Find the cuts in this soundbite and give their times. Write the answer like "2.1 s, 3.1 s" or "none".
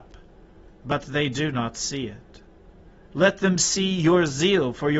none